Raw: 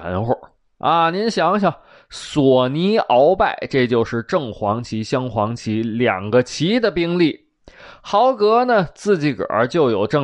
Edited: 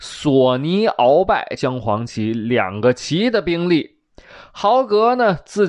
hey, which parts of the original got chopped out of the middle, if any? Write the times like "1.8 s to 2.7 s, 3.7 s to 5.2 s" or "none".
3.7 s to 5.1 s

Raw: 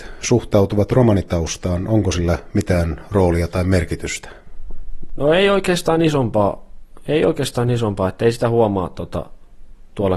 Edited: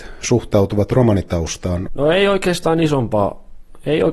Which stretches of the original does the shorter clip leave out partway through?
1.9 s to 5.1 s

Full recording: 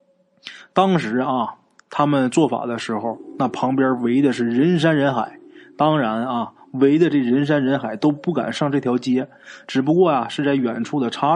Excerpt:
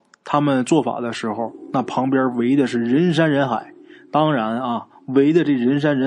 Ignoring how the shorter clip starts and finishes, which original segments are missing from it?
none

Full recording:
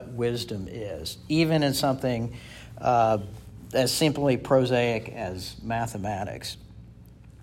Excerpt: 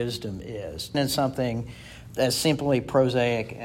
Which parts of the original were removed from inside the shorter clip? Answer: 1.2 s to 1.6 s, 2.7 s to 3.7 s

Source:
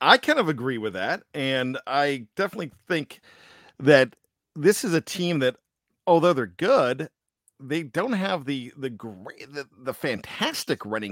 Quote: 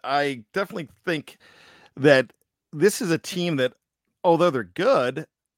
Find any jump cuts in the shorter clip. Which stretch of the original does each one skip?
none

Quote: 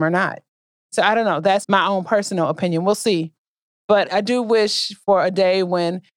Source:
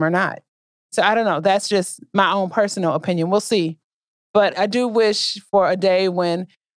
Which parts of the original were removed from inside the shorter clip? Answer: 1.6 s to 2.1 s

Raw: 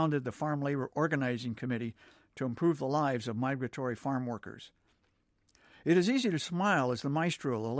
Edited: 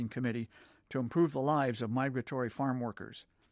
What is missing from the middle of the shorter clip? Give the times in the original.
none

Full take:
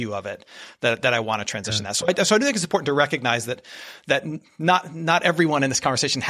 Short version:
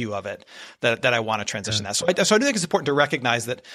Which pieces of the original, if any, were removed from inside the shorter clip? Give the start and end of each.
none

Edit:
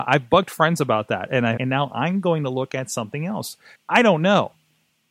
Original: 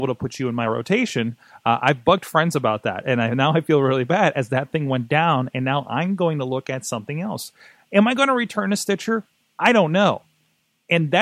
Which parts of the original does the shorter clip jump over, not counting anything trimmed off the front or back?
3.3 s to 5.5 s, 7.7 s to 9.4 s

